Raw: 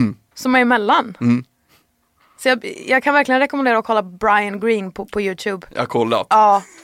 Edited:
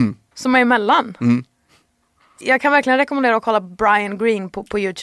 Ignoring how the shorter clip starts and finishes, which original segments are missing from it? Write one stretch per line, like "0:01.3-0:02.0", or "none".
0:02.4-0:02.8